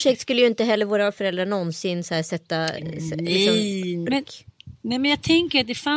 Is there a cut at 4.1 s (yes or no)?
yes